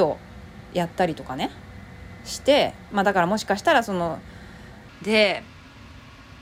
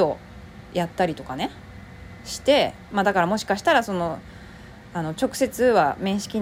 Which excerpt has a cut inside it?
first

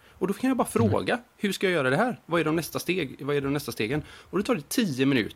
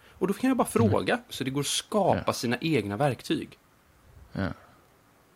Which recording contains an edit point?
second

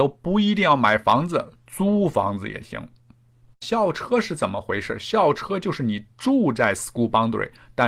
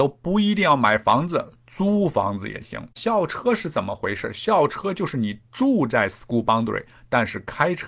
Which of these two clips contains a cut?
second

